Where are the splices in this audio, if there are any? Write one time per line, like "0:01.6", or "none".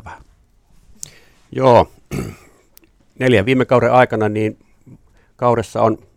none